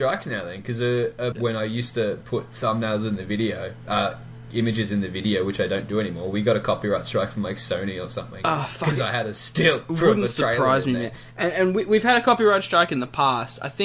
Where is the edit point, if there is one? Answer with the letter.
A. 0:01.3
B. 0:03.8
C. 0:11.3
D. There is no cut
A